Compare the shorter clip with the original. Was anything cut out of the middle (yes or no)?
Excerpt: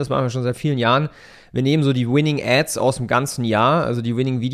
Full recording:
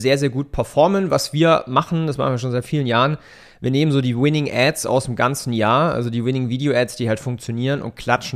no